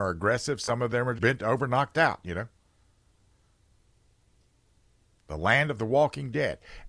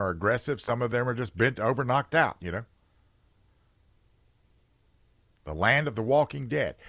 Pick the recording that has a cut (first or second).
first